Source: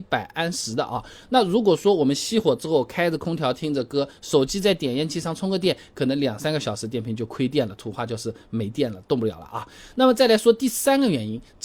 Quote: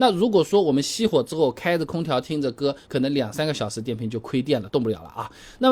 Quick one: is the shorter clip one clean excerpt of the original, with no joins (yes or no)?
no